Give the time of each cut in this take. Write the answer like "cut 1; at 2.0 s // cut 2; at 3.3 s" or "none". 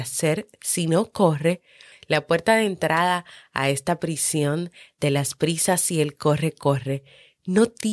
cut 1; at 1.9 s